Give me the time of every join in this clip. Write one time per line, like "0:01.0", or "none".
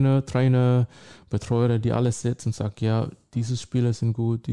none